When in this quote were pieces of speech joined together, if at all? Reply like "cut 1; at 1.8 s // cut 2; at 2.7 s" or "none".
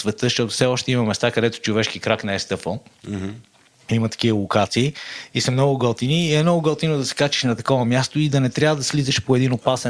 none